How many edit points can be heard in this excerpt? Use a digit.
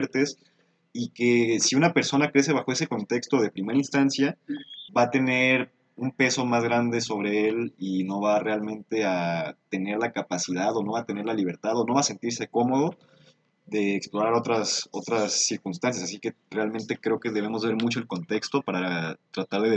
1